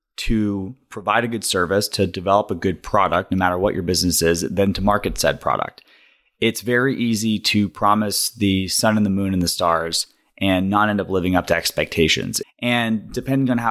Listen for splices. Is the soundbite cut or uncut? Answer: cut